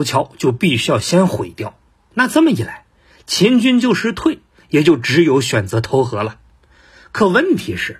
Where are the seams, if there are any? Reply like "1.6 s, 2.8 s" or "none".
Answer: none